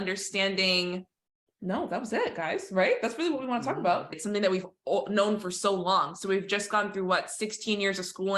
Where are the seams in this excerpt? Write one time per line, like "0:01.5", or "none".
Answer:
0:04.1